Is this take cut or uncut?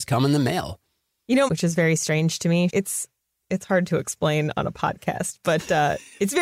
cut